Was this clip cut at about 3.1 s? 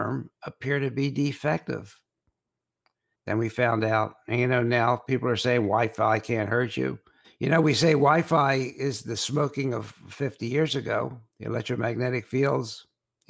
yes; 2 cuts; at 3.1 s, 7.2 s

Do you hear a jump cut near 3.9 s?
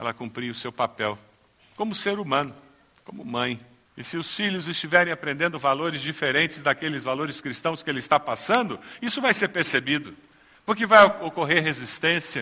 yes; 1 cut; at 3.9 s

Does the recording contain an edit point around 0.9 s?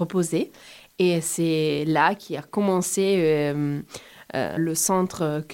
no; 1 cut; at 4.6 s

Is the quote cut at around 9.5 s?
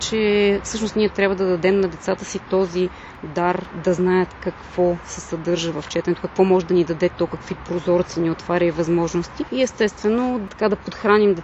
no; 0 cuts

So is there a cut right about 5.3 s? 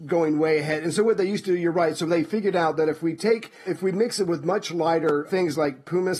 yes; 2 cuts; at 3.7 s, 5.3 s

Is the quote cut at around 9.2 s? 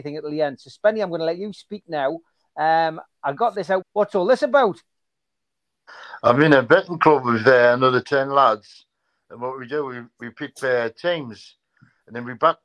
no; 1 cut; at 3.8 s

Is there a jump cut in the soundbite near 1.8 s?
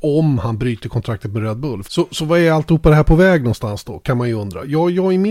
yes; 1 cut; at 1.8 s

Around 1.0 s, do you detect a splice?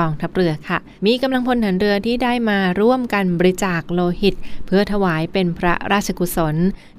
yes; 1 cut; at 1.0 s

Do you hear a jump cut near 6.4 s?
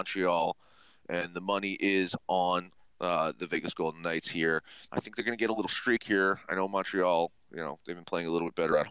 no; 1 cut; at 4.9 s

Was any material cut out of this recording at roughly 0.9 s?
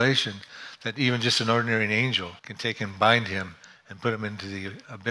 no; 1 cut; at 2.4 s

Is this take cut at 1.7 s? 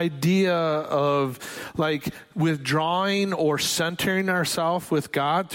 no; 0 cuts

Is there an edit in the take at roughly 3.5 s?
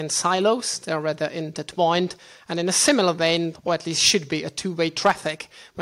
yes; 1 cut; at 3.5 s

